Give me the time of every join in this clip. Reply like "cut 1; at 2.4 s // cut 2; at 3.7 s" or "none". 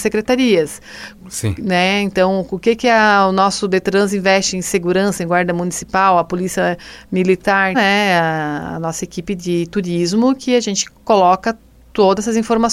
cut 1; at 1.2 s // cut 2; at 7.7 s